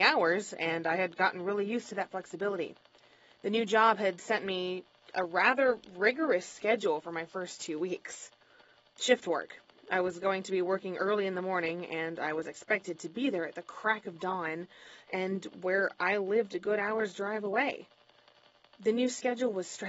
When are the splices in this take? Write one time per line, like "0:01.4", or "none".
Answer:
none